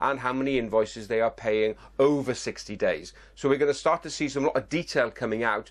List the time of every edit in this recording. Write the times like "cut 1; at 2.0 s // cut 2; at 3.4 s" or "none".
none